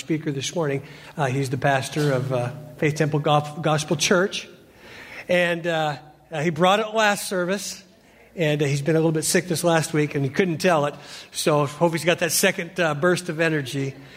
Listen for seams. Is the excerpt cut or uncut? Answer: uncut